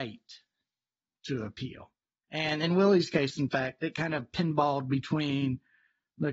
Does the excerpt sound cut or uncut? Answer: cut